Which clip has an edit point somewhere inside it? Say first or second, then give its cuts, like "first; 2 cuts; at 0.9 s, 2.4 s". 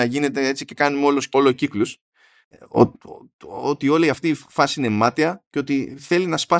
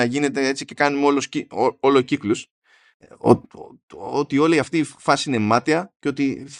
first; 1 cut; at 1.3 s